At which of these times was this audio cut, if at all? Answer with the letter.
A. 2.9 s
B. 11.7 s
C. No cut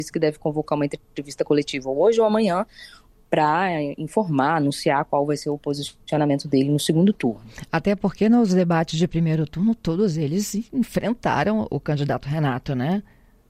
B